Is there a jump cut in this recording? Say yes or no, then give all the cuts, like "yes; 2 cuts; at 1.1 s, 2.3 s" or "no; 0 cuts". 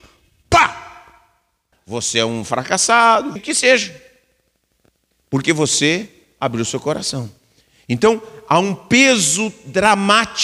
yes; 2 cuts; at 1.7 s, 3.4 s